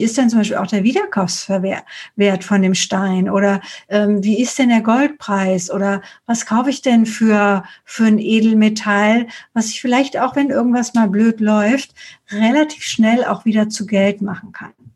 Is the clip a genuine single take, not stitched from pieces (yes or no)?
yes